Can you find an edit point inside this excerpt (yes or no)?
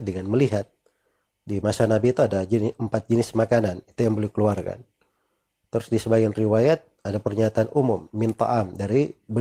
yes